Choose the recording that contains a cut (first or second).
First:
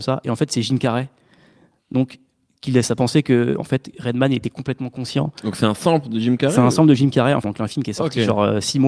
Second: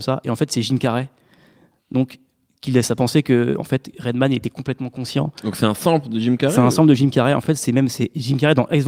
first